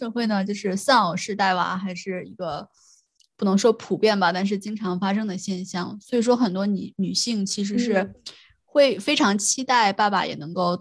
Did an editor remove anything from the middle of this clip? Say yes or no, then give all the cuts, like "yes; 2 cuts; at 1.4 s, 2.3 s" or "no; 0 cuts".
no; 0 cuts